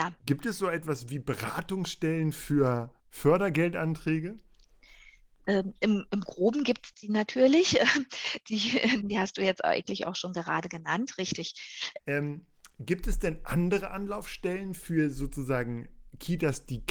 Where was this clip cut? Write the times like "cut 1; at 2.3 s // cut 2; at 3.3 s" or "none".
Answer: cut 1; at 3.0 s // cut 2; at 9.0 s // cut 3; at 12.0 s